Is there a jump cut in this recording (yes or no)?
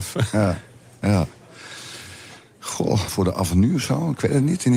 yes